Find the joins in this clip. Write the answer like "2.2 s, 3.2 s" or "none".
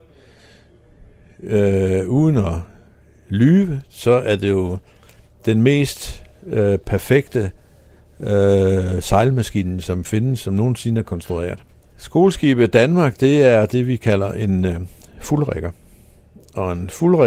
11.8 s